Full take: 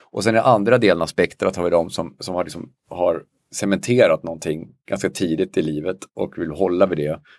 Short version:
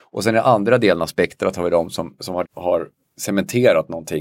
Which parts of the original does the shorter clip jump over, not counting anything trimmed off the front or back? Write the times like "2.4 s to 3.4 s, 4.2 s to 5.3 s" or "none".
2.4 s to 2.8 s

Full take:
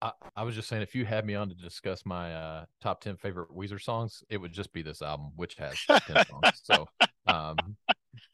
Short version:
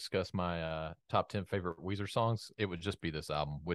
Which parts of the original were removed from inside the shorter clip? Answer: none

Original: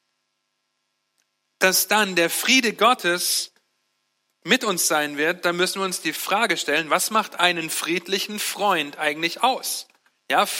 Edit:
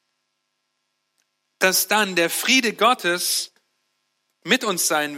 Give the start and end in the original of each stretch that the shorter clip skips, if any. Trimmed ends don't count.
none

